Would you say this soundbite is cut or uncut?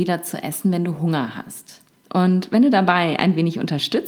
cut